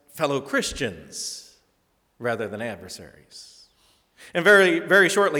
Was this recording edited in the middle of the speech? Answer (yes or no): no